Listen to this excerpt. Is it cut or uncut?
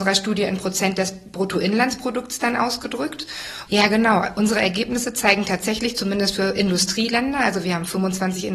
cut